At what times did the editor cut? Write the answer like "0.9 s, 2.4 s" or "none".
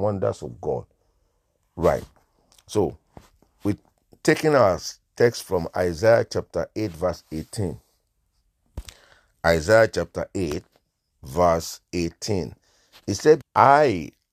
13.4 s